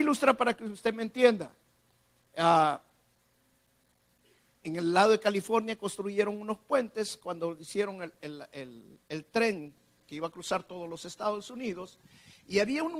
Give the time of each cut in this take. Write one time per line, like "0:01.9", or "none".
none